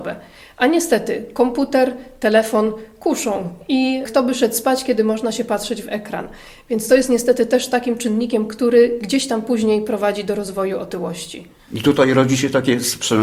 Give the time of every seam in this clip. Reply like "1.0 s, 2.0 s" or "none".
none